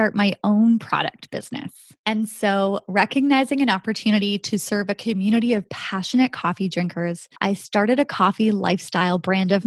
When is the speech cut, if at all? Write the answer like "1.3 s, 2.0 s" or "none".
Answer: 2.0 s, 7.3 s